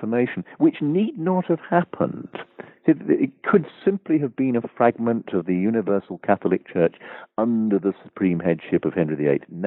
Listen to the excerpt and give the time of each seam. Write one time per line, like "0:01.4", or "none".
none